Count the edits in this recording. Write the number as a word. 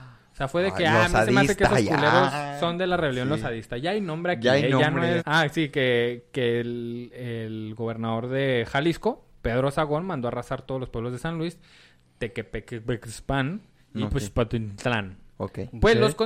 one